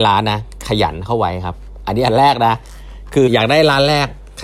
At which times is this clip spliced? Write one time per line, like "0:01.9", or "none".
0:03.3